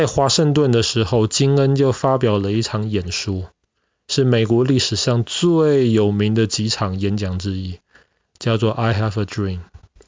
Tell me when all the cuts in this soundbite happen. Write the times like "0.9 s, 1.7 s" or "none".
none